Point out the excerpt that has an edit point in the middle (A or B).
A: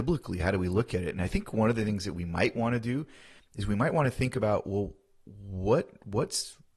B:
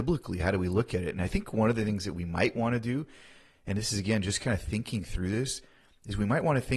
A